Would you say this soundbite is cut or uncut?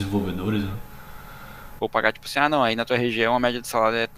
cut